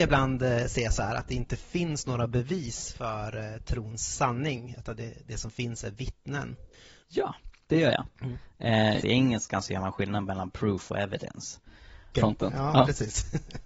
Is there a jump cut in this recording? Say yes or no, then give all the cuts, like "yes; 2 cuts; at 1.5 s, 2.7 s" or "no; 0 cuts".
yes; 3 cuts; at 7.0 s, 9.0 s, 12.1 s